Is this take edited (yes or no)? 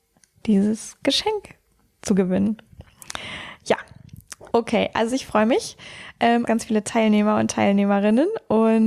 yes